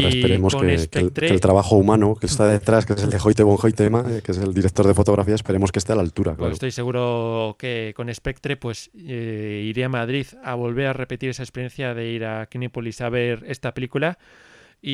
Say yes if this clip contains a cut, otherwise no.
no